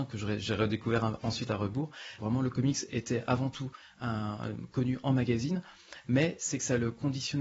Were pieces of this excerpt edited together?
yes; 1 cut; at 2.2 s

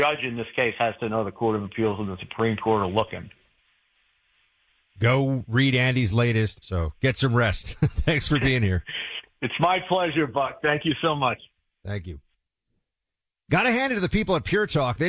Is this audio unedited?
no; 1 cut; at 6.6 s

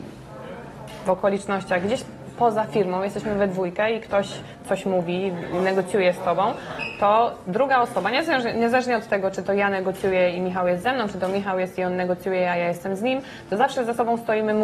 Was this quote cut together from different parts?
no; 0 cuts

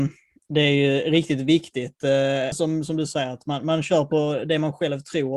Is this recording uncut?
no; 1 cut; at 2.5 s

